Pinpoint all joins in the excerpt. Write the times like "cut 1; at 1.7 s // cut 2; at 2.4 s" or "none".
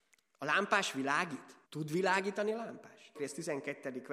cut 1; at 1.6 s // cut 2; at 3.1 s

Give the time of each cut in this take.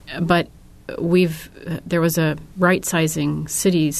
none

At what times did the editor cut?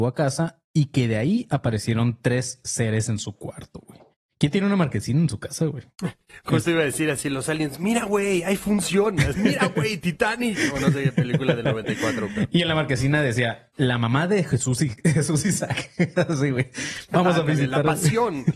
cut 1; at 9.3 s

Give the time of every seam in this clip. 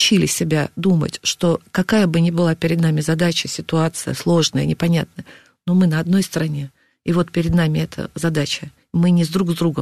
none

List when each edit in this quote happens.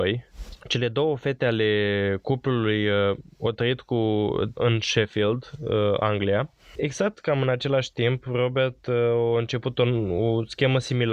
cut 1; at 4.6 s

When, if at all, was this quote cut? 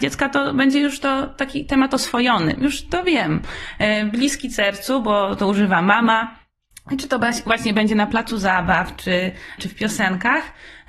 cut 1; at 2.6 s // cut 2; at 9.6 s

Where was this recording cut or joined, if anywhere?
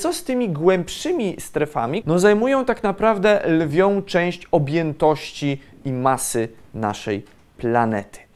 cut 1; at 2.0 s

